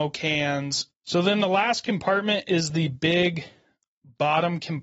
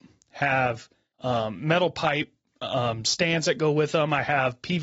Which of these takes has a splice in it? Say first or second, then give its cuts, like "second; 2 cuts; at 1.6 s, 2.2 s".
first; 1 cut; at 0.9 s